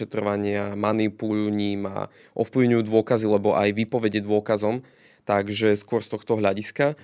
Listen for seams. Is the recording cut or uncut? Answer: uncut